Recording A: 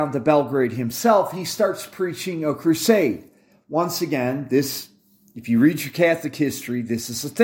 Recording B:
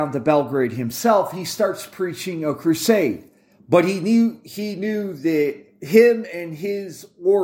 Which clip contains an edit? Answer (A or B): B